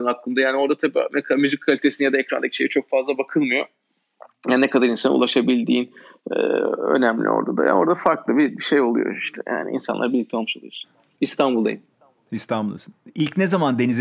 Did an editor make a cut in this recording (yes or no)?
yes